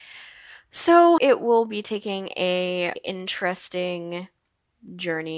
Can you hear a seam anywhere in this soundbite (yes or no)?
yes